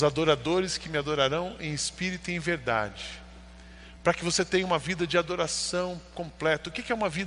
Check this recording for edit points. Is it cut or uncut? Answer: uncut